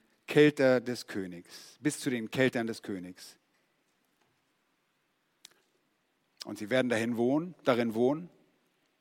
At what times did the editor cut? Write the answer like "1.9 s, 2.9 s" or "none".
none